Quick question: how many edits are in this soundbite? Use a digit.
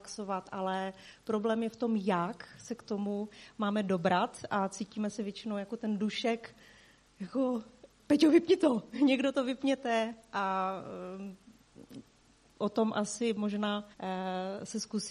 1